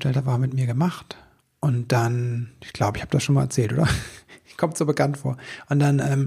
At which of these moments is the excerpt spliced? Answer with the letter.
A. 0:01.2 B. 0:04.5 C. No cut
C